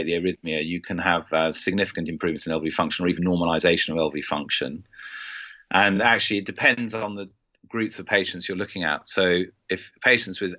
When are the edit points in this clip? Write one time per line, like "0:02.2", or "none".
none